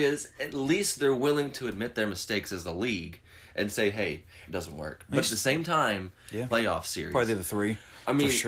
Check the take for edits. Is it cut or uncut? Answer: cut